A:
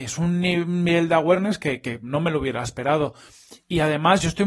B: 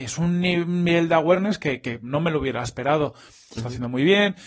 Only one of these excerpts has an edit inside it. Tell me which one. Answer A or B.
B